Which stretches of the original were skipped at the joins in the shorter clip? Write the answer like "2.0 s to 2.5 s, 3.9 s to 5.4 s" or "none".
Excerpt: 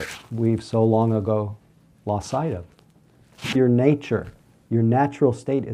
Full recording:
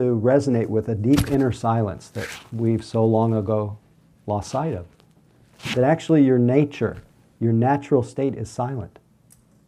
5.8 s to 6.3 s